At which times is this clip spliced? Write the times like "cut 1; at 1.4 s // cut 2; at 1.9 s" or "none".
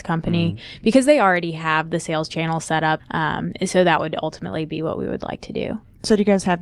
cut 1; at 3.0 s